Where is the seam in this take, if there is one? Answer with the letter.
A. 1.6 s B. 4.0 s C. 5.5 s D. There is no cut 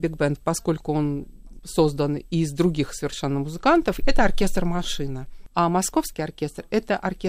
B